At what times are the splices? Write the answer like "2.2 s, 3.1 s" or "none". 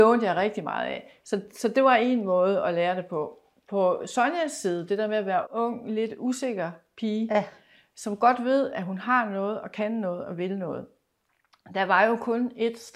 5.4 s